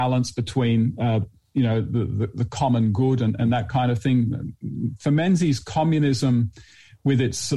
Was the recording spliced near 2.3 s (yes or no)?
no